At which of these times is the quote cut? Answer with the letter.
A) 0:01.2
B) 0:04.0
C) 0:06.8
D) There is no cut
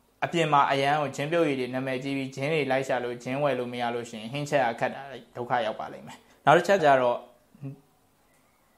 C